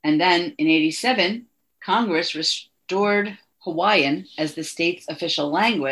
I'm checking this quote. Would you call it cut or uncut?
uncut